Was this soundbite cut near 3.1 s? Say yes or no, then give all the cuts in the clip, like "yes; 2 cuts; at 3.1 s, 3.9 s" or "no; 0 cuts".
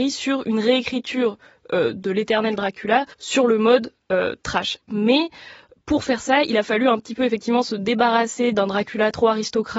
yes; 1 cut; at 3.1 s